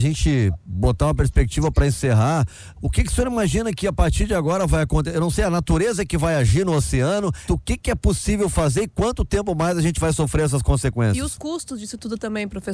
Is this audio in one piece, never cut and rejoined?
no; 2 cuts; at 2.8 s, 7.5 s

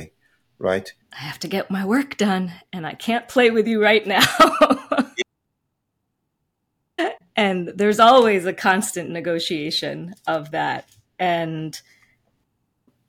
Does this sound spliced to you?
yes; 1 cut; at 1.0 s

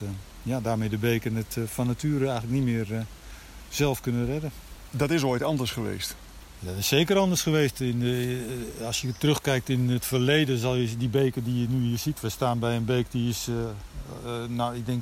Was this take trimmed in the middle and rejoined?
no; 0 cuts

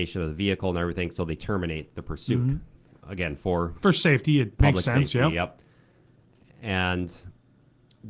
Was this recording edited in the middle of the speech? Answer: no; 0 cuts

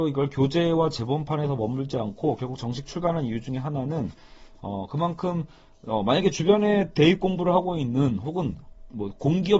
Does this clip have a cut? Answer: no; 0 cuts

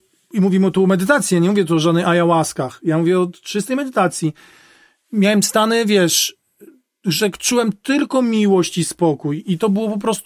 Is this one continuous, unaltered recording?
yes; 0 cuts

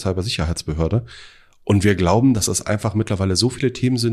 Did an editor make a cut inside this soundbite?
no; 0 cuts

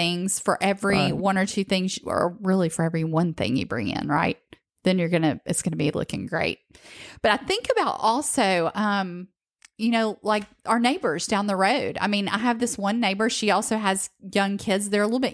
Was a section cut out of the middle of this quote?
no; 0 cuts

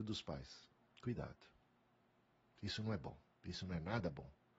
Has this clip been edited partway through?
no; 0 cuts

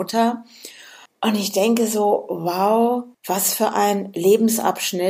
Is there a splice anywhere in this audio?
yes; 2 cuts; at 1.1 s, 3.1 s

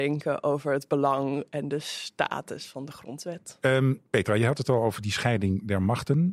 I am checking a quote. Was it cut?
no; 0 cuts

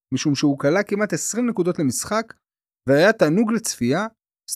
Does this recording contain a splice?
no; 0 cuts

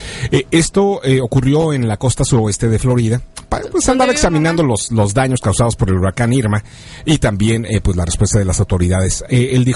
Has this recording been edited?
no; 0 cuts

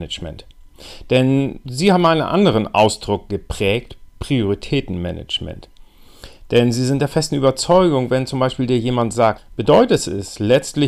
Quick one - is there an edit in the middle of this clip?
yes; 1 cut; at 9.4 s

